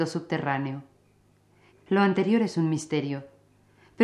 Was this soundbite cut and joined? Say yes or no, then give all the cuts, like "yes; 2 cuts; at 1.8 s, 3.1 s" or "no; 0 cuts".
yes; 1 cut; at 1.7 s